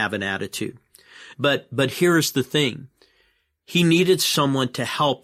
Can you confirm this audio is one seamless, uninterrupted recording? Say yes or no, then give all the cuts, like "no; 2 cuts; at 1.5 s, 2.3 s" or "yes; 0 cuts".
no; 1 cut; at 1.3 s